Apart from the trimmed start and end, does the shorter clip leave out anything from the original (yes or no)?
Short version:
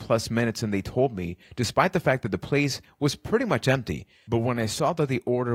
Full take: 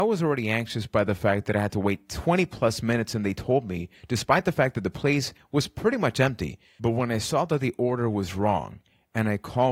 no